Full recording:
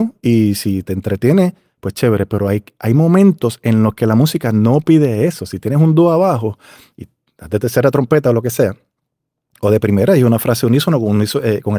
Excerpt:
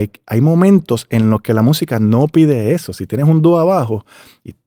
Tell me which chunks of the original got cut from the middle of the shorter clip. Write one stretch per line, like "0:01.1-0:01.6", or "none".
none